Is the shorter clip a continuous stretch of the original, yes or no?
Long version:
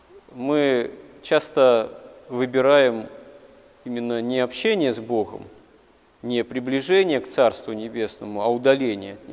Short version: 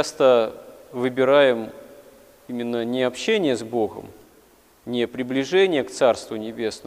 yes